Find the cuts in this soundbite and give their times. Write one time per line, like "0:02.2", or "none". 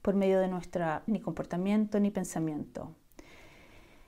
0:01.1